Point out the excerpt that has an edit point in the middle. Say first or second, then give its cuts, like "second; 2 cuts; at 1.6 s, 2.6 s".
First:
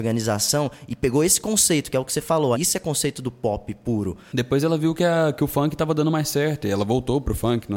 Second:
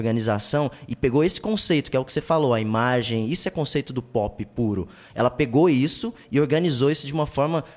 first; 2 cuts; at 2.5 s, 4.3 s